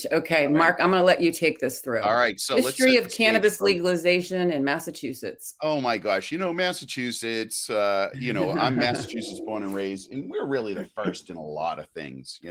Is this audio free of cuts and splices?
yes; 0 cuts

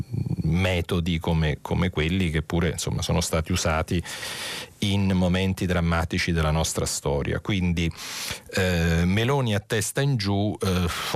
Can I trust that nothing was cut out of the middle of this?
yes; 0 cuts

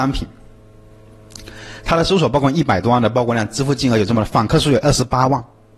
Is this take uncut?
yes; 0 cuts

